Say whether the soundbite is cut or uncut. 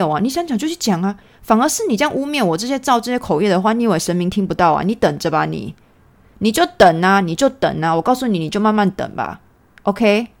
uncut